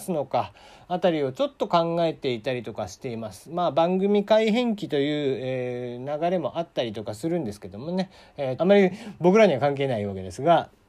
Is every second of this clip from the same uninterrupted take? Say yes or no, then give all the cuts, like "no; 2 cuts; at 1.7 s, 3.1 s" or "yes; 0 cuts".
no; 1 cut; at 8.6 s